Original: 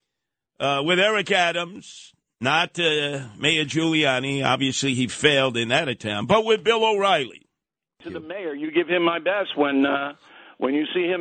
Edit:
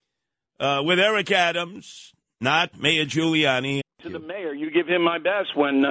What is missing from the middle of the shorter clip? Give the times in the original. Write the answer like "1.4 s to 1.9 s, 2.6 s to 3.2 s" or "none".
2.7 s to 3.3 s, 4.4 s to 7.8 s